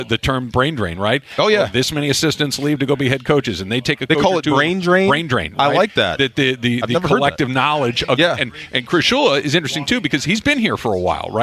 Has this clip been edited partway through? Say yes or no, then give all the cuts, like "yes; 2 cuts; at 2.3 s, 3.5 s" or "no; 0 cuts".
no; 0 cuts